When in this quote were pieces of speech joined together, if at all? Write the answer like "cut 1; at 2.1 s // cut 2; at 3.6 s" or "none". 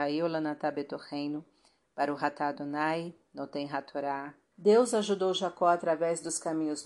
cut 1; at 4.5 s